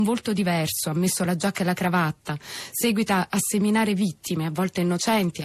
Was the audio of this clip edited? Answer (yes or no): no